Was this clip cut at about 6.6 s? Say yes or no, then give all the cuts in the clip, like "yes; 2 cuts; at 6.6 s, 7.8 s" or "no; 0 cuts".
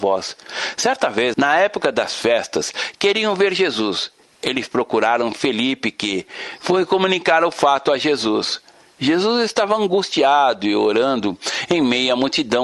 yes; 2 cuts; at 1.3 s, 6.6 s